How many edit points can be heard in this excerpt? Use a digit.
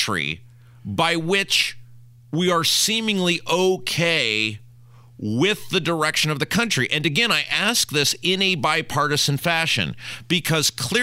0